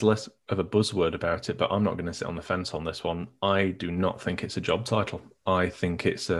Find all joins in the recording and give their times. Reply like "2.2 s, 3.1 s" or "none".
none